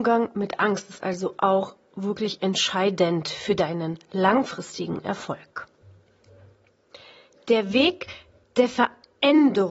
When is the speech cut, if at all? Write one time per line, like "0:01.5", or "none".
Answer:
none